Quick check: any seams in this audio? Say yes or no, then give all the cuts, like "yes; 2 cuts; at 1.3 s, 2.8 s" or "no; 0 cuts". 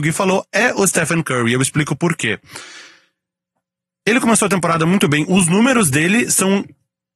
no; 0 cuts